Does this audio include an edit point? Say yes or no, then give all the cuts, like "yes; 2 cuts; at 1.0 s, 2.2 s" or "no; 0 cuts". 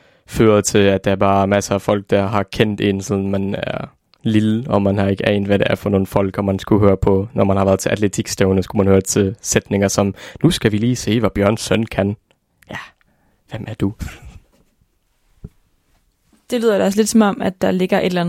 no; 0 cuts